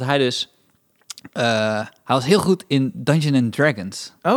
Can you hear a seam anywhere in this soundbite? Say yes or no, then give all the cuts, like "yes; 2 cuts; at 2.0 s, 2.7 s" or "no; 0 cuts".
no; 0 cuts